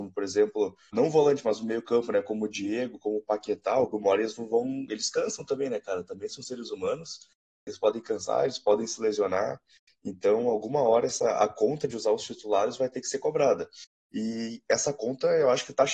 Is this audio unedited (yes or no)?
no